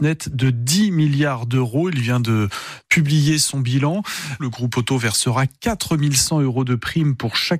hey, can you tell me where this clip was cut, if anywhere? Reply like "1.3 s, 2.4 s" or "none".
4.4 s